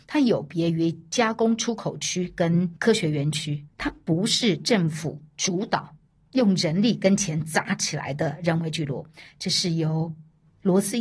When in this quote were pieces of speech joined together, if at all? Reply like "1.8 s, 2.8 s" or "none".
none

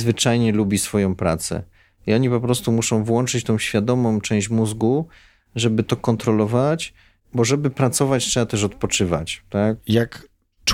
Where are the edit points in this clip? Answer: 9.8 s

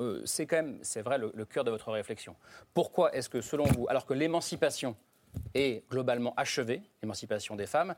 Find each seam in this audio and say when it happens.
none

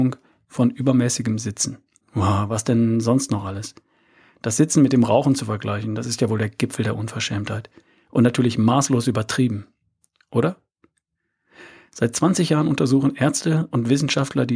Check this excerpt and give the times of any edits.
2.0 s

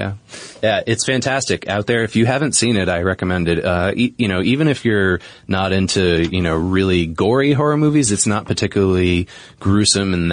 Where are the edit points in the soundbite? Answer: none

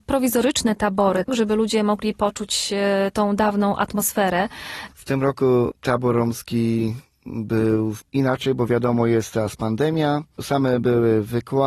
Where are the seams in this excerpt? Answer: none

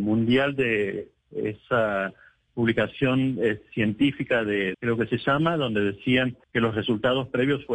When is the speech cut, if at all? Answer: 4.7 s, 6.4 s

